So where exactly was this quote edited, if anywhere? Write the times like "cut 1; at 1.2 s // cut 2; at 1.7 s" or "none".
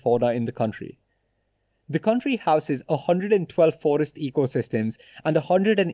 none